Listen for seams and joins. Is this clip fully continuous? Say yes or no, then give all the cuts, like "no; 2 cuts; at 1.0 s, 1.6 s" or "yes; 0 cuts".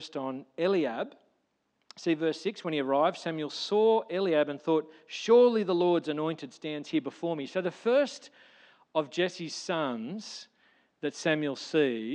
yes; 0 cuts